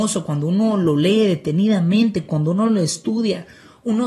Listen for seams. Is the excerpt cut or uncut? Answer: uncut